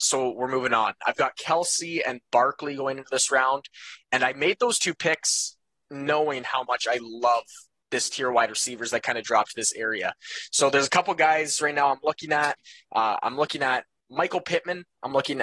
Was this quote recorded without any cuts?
no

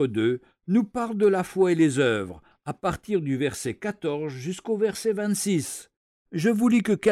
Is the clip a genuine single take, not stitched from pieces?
yes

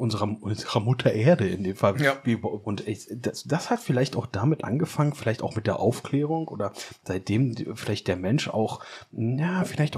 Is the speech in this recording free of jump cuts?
no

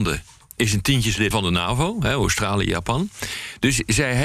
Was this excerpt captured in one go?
no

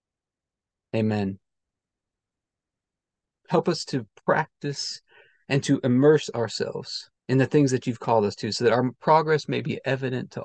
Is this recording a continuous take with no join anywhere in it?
no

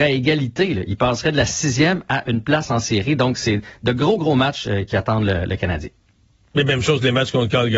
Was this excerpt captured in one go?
yes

